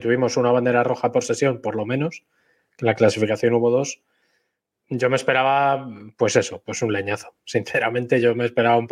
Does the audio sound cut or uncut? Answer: uncut